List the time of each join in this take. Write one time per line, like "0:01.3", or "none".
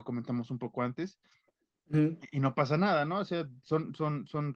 none